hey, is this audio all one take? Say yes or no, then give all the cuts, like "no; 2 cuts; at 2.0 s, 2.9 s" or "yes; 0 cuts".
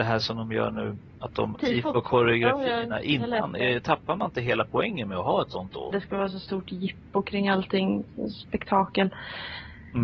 no; 2 cuts; at 1.5 s, 5.9 s